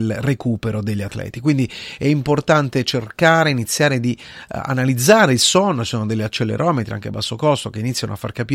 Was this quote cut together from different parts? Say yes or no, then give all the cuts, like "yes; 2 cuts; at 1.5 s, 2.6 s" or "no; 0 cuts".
no; 0 cuts